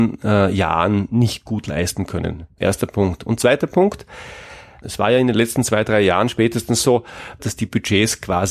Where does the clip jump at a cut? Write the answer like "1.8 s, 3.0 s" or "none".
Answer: 2.6 s, 4.8 s, 7.4 s